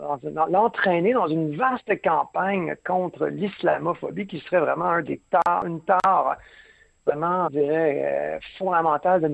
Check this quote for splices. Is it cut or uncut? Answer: cut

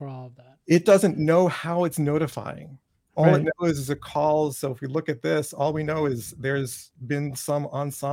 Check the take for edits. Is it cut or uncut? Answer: uncut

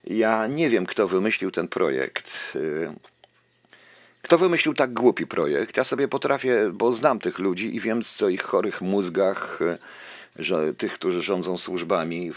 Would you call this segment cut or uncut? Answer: uncut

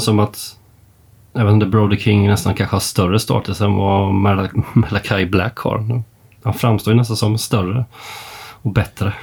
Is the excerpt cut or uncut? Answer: uncut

